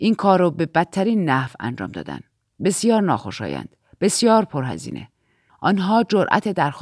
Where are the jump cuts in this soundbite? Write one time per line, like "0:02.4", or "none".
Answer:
0:05.5